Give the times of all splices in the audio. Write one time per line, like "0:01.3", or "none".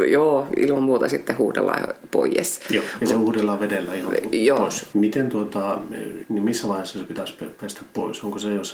0:04.9
0:06.2